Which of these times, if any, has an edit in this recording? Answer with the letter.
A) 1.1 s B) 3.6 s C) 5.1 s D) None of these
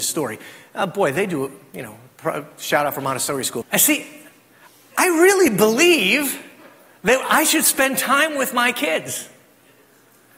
B